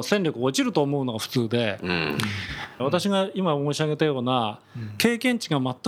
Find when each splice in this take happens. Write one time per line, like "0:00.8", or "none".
0:02.8